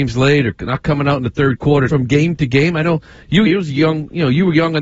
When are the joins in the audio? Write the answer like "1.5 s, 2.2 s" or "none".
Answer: 1.9 s, 3.5 s